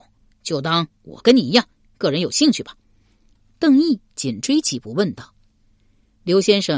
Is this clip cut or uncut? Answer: uncut